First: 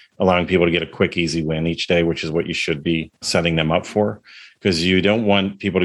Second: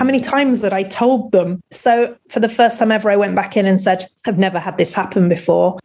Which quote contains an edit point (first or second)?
second